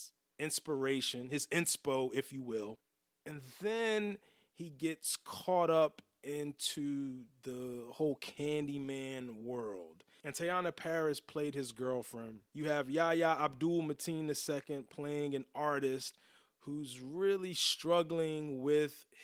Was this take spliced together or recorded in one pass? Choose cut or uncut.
cut